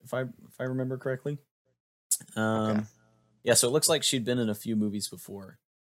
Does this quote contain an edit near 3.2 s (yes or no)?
no